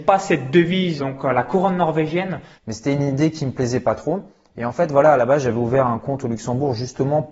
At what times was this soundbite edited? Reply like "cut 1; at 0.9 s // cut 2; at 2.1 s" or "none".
cut 1; at 1.0 s // cut 2; at 2.6 s